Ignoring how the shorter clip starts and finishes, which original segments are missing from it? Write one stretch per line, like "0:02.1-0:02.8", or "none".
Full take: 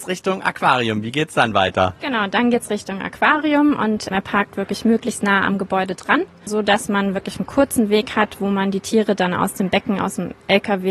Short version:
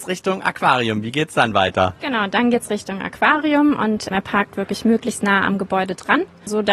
none

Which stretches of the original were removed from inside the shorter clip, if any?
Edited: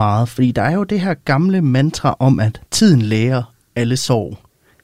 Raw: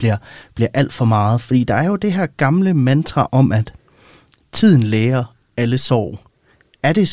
0:03.8-0:04.5

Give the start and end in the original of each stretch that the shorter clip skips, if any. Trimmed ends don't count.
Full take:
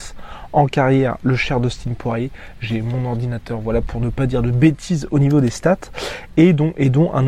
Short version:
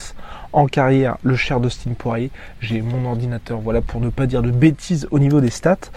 none

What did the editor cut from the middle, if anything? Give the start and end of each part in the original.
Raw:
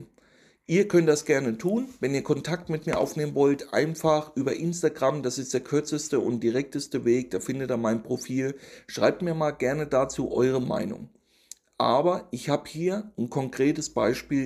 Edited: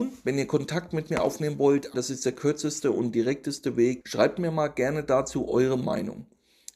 0:03.7-0:05.2
0:07.3-0:08.8

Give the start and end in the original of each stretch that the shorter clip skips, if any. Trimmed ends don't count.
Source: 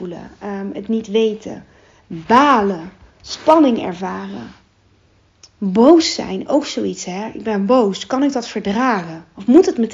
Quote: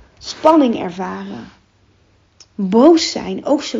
none

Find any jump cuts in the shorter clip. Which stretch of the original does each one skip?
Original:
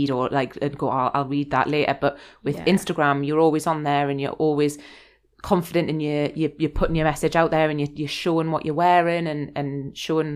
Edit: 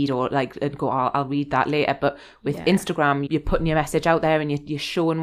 0:03.3-0:06.6

